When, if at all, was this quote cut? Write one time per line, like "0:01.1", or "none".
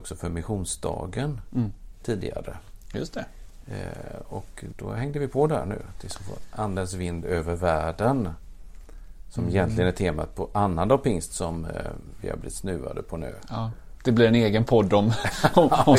0:04.7